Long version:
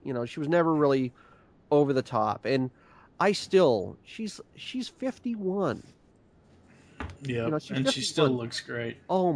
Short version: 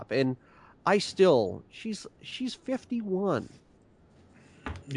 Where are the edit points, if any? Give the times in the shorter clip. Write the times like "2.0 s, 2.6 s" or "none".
none